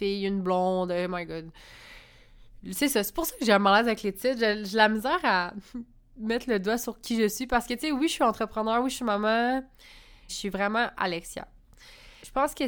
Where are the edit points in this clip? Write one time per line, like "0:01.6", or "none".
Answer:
0:10.3